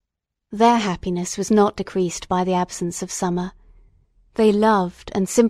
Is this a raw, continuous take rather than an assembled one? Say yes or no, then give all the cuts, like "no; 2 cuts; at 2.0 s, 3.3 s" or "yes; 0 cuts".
yes; 0 cuts